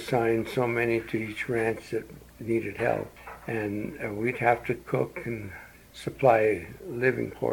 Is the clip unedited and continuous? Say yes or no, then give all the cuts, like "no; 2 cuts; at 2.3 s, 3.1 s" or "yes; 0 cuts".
yes; 0 cuts